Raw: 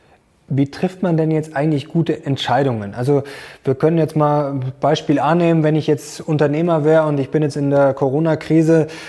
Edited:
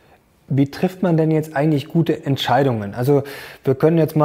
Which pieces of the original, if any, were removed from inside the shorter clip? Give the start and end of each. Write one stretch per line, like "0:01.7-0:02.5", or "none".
none